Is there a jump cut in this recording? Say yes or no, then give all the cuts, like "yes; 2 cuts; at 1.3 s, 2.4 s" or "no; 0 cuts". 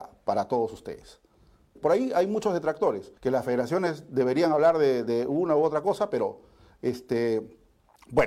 yes; 2 cuts; at 1.8 s, 3.2 s